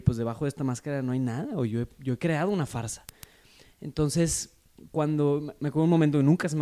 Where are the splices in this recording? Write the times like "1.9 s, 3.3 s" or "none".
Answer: none